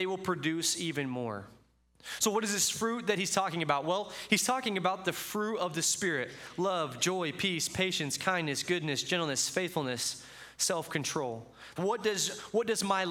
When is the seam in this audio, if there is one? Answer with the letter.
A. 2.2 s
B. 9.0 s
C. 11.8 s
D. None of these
C